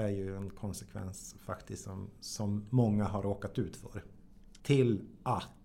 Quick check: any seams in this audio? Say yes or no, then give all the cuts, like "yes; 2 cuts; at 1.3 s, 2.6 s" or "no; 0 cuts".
yes; 1 cut; at 4.6 s